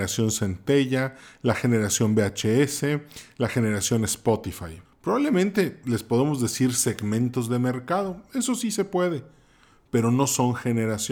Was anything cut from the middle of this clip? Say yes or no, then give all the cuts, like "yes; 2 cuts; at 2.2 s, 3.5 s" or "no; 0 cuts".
yes; 1 cut; at 4.8 s